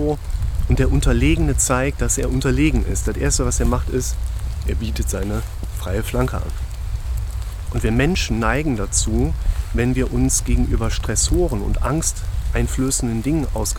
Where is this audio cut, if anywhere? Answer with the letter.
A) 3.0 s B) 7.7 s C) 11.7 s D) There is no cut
D